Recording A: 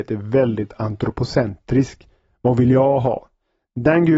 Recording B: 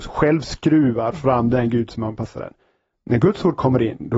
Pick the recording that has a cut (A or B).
B